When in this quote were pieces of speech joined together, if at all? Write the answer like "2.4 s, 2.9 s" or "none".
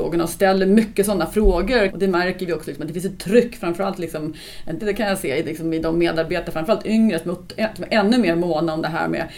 1.9 s, 4.8 s